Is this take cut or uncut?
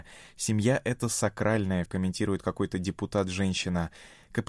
cut